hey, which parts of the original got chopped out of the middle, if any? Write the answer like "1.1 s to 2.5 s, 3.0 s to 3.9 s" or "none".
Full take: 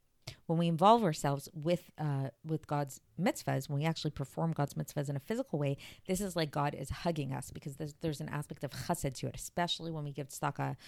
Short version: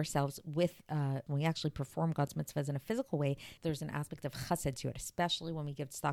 2.4 s to 3.7 s, 6.0 s to 8.0 s